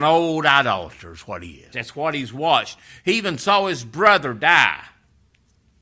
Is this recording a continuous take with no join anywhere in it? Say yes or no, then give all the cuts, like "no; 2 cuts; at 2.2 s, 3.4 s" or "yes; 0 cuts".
no; 1 cut; at 1.7 s